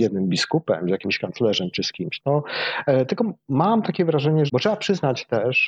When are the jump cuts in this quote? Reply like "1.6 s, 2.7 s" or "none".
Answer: 2.2 s, 4.5 s